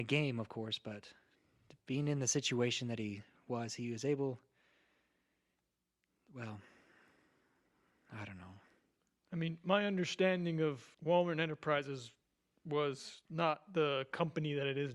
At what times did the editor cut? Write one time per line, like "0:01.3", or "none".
0:10.9
0:13.2